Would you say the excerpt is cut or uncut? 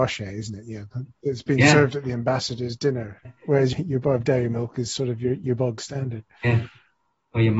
uncut